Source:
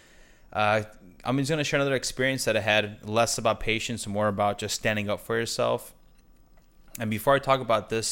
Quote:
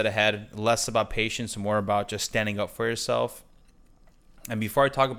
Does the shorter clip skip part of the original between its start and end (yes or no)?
no